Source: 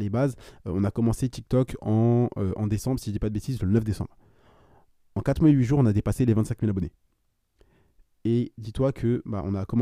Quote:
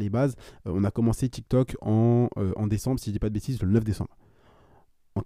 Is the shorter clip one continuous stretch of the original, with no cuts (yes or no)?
yes